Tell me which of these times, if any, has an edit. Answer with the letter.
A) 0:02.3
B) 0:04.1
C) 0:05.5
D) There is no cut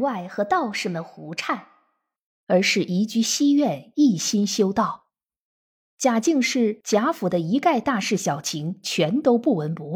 A